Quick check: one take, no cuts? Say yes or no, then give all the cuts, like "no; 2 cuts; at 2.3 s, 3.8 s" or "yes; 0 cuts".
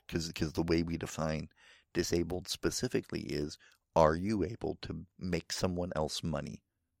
yes; 0 cuts